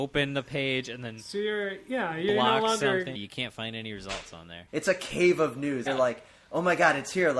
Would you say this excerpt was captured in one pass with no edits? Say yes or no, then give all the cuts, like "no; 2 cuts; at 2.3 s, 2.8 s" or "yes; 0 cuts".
no; 3 cuts; at 3.1 s, 4.7 s, 5.9 s